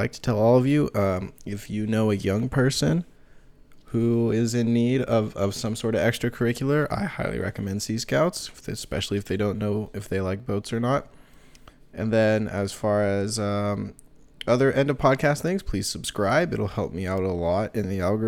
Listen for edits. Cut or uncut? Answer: uncut